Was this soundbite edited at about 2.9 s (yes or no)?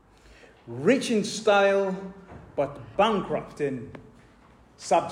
yes